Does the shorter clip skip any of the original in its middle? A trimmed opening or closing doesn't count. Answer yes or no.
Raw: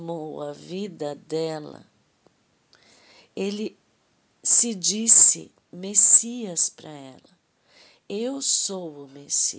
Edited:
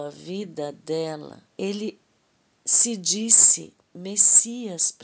yes